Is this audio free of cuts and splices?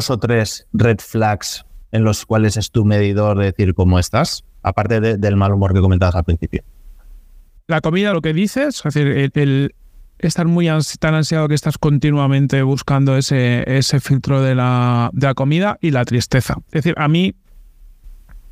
yes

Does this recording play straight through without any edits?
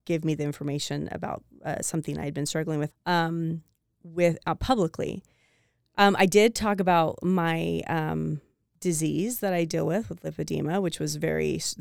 no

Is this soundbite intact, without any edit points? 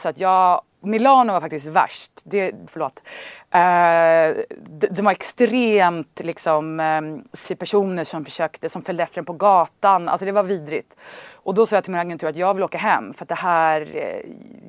no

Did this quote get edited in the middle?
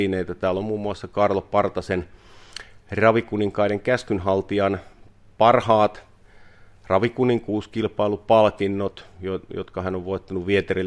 no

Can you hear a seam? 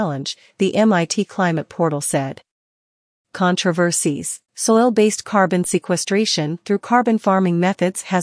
yes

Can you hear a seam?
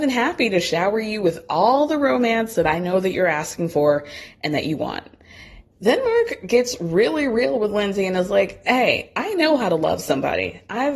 yes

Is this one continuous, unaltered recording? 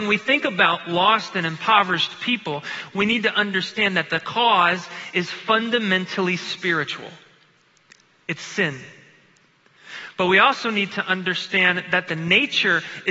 yes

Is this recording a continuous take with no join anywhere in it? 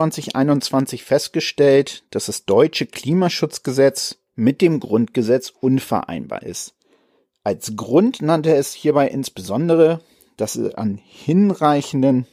no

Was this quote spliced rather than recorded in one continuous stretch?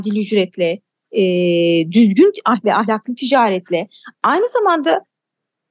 no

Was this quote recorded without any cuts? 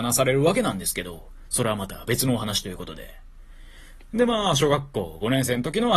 yes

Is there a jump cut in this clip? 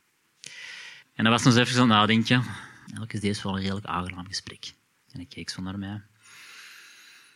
yes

